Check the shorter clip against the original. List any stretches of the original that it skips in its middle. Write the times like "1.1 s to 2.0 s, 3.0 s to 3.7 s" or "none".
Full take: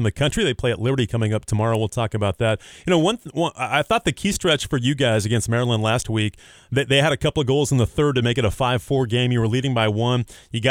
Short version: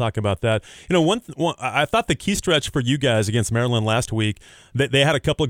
none